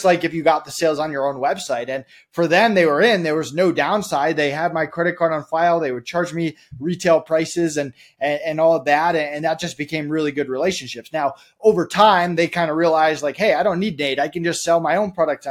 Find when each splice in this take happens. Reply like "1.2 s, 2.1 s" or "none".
none